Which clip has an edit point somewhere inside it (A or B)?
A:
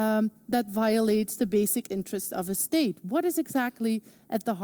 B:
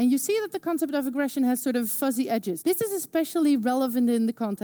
B